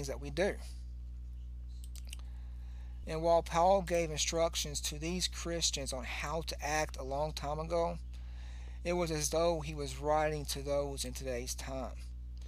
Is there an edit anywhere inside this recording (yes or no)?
yes